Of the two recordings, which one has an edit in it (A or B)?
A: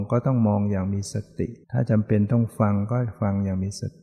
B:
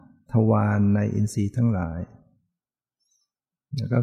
A